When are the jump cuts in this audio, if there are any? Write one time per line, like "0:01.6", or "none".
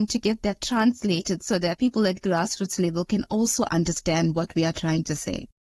none